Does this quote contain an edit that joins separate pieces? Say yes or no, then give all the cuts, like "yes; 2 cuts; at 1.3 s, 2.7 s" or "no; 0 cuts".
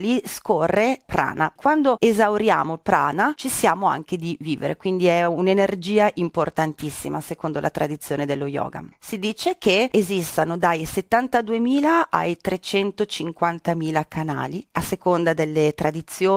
yes; 1 cut; at 1.6 s